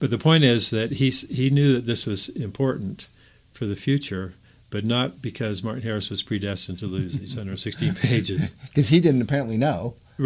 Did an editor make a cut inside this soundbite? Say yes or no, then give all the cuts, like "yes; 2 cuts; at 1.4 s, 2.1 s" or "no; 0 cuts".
no; 0 cuts